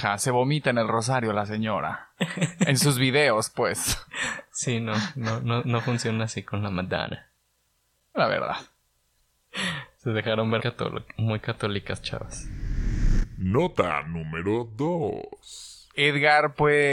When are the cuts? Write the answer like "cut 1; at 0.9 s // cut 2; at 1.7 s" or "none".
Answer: cut 1; at 8.1 s // cut 2; at 10.6 s